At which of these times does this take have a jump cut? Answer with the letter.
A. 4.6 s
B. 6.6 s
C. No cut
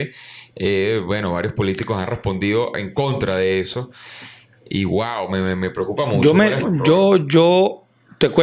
B